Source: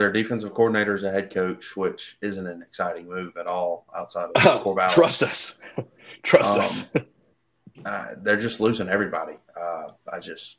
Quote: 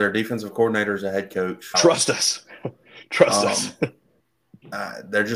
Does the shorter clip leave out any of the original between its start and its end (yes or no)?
yes